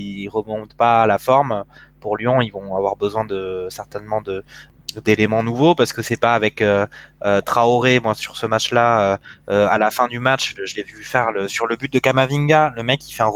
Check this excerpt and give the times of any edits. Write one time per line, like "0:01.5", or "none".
none